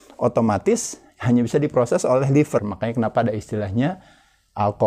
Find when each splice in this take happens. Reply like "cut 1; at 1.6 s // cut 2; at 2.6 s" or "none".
cut 1; at 2.6 s